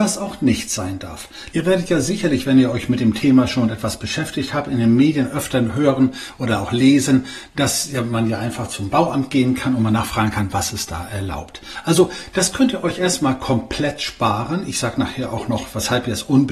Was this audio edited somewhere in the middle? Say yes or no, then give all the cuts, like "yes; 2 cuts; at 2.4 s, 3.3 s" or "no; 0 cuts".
yes; 1 cut; at 1.5 s